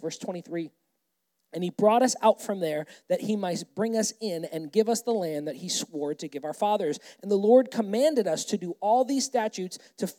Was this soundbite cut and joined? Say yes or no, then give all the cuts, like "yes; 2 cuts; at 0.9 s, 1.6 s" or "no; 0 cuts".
no; 0 cuts